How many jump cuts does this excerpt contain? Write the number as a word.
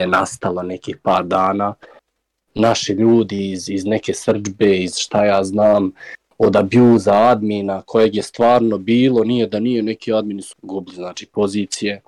one